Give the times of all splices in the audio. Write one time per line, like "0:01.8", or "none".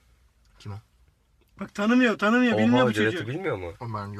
none

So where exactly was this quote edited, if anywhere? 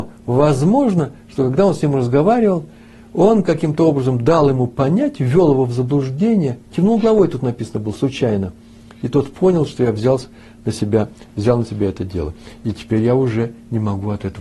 none

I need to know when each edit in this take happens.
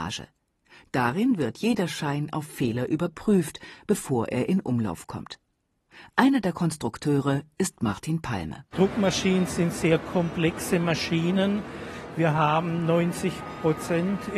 0:08.7

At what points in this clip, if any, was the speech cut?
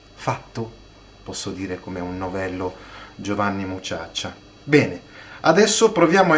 none

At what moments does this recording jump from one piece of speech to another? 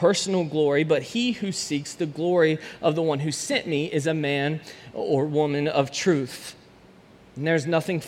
none

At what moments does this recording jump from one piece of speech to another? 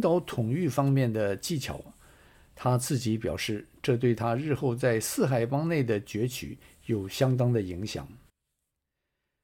none

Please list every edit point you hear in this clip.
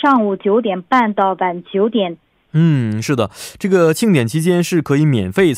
0:02.4

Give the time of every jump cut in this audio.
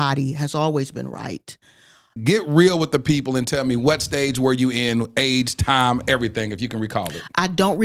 0:02.2

